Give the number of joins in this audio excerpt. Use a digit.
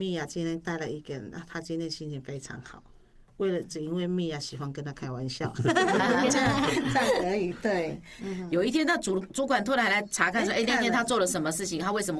2